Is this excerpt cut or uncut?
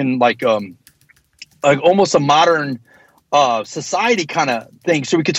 uncut